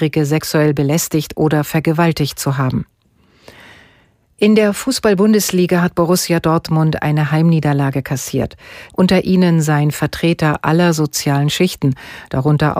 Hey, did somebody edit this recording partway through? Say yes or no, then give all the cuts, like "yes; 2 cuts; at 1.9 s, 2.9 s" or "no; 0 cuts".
yes; 1 cut; at 8.9 s